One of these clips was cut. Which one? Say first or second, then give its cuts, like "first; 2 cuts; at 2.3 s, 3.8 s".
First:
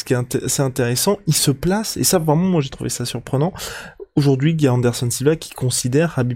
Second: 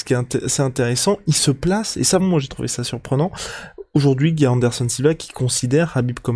second; 1 cut; at 2.2 s